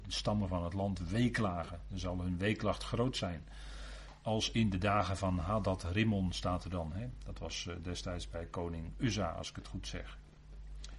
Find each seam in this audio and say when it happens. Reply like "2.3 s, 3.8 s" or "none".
none